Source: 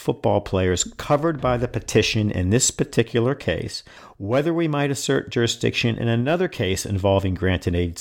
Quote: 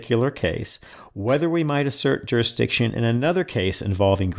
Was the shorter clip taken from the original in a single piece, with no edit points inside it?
yes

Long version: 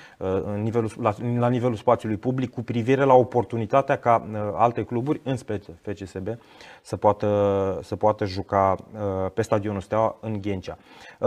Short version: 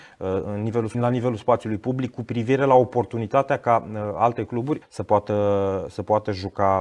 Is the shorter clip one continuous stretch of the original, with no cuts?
no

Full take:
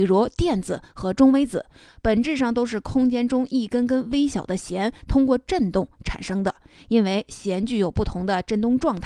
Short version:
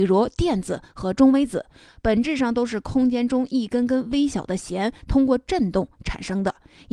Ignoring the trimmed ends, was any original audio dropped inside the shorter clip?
no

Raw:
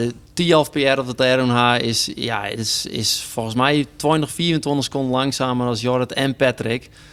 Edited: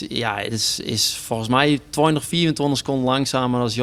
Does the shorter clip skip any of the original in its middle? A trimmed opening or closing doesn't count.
no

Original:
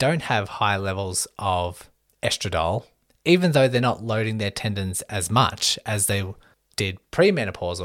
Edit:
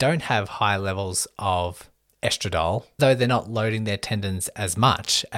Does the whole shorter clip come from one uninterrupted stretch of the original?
no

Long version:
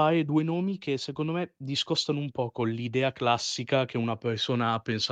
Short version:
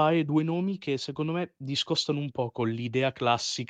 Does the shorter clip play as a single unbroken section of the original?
yes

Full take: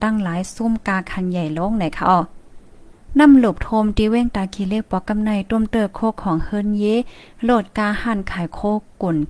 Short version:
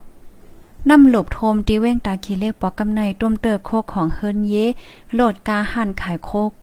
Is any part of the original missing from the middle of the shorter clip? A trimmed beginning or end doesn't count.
no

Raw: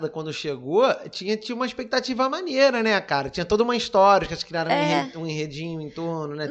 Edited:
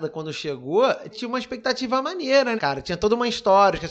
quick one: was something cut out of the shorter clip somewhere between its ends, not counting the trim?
yes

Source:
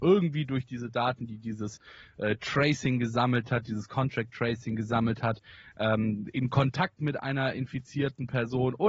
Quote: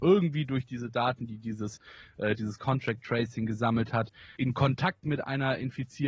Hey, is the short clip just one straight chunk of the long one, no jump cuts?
no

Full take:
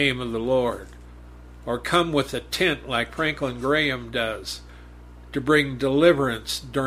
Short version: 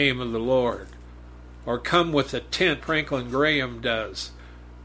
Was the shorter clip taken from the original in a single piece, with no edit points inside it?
no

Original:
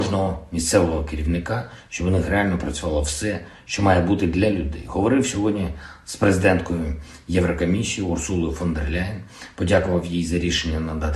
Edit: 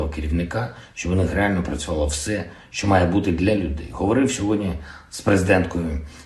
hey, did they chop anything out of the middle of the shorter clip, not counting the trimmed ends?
no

